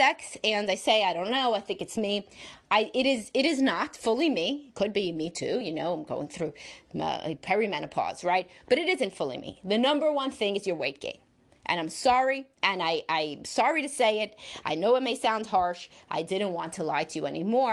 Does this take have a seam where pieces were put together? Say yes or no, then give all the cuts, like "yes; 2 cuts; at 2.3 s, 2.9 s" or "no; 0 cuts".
no; 0 cuts